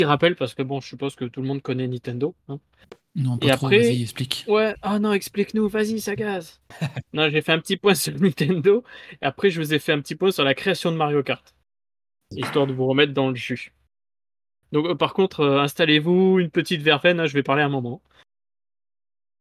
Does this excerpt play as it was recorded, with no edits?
yes; 0 cuts

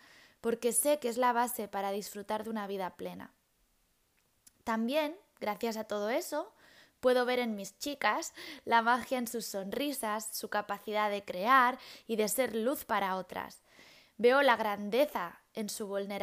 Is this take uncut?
yes; 0 cuts

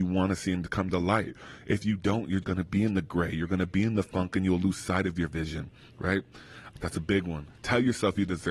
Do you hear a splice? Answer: yes; 2 cuts; at 2.4 s, 6.7 s

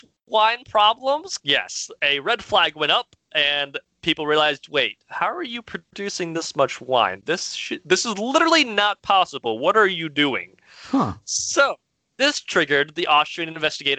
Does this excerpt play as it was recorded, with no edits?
no; 1 cut; at 1.4 s

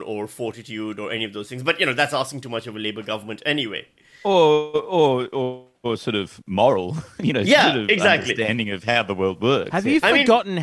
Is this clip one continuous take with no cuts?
yes; 0 cuts

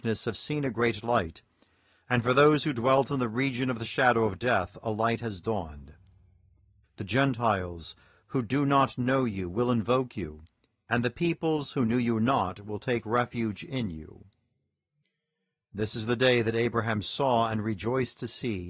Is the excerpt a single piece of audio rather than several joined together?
no; 1 cut; at 6.8 s

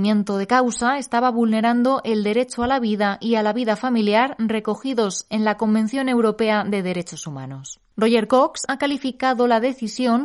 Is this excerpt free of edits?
no; 1 cut; at 8.7 s

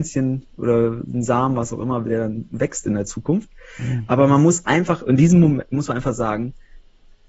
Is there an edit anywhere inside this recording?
no; 0 cuts

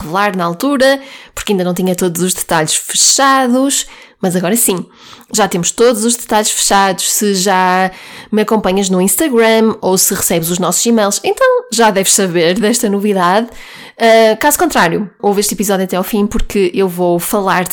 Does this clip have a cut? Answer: yes; 1 cut; at 15.2 s

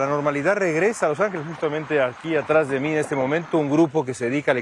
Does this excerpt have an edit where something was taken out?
no; 0 cuts

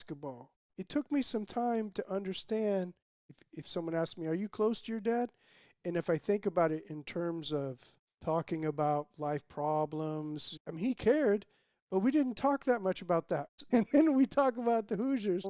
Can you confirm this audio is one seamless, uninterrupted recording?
no; 2 cuts; at 10.6 s, 13.7 s

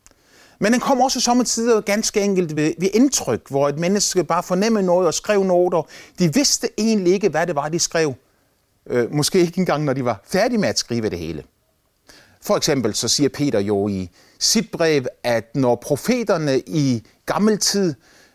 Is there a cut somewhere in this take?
no; 0 cuts

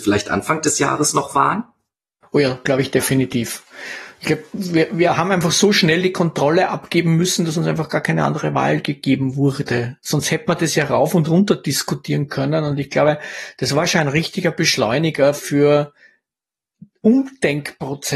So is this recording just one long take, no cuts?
yes; 0 cuts

